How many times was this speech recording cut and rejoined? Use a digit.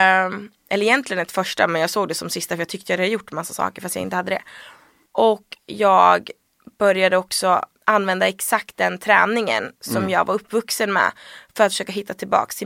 1